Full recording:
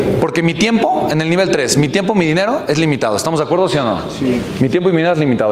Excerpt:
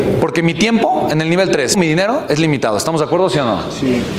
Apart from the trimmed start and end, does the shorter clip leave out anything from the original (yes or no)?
yes